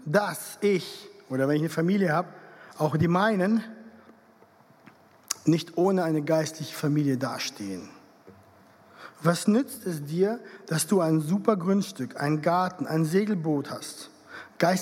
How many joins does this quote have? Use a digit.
0